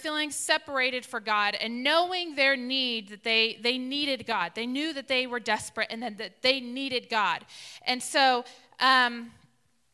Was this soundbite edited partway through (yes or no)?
no